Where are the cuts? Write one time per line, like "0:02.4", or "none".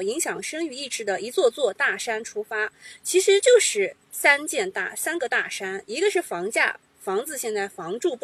none